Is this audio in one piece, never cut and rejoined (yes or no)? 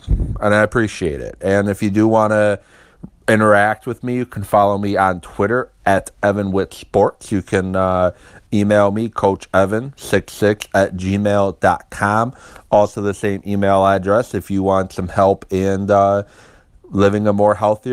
yes